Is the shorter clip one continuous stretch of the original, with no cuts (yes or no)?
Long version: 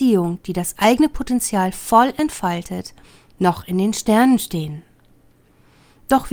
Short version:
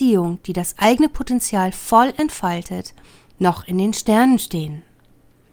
yes